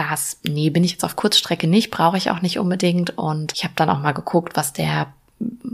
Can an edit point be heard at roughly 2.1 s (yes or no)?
no